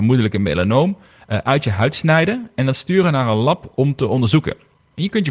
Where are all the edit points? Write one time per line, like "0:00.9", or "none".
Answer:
none